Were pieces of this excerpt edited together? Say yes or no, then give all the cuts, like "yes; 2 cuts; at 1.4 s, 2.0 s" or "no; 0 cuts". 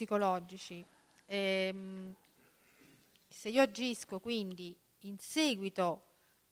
no; 0 cuts